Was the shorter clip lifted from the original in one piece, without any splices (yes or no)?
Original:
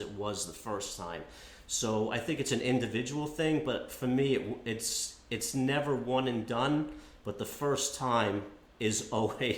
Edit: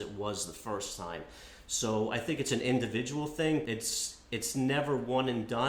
no